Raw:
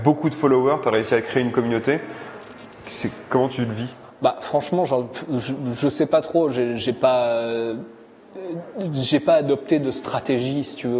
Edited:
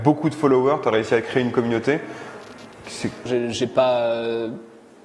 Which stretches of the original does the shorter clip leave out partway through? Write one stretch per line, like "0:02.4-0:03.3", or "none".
0:03.3-0:06.5